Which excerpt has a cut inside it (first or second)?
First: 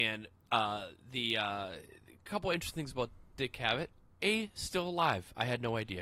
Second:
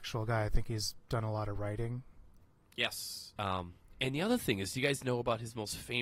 second